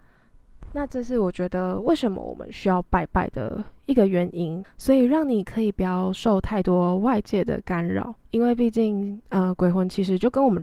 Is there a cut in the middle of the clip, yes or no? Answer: yes